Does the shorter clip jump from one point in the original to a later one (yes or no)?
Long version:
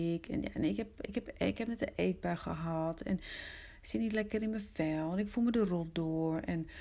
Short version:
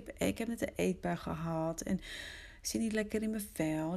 no